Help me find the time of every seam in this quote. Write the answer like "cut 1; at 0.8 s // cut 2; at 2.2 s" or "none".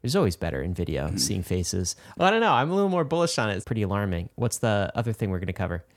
cut 1; at 2.2 s // cut 2; at 3.6 s